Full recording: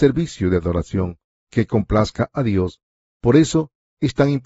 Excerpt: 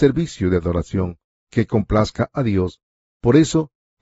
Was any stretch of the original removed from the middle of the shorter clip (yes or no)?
no